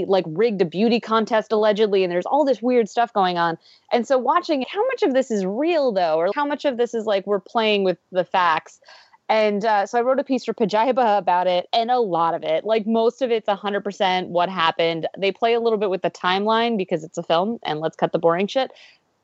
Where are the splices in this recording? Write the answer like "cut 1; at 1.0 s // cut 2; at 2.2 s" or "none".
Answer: cut 1; at 4.6 s // cut 2; at 6.3 s